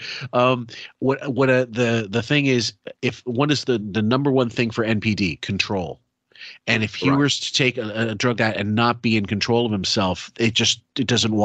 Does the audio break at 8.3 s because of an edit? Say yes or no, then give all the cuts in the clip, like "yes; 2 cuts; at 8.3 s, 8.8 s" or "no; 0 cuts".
yes; 1 cut; at 8.3 s